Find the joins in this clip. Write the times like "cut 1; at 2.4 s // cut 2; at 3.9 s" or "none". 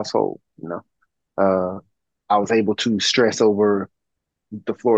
none